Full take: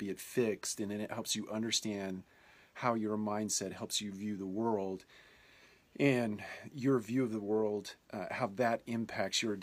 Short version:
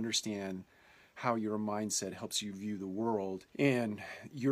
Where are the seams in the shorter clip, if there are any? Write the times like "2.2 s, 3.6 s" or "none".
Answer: 3.5 s